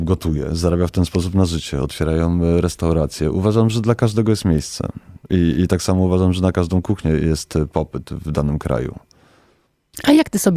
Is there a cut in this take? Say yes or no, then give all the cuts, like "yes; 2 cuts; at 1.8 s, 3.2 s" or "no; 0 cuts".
no; 0 cuts